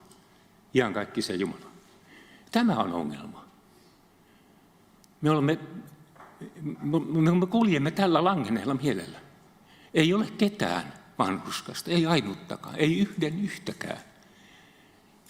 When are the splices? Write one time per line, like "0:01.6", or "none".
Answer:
none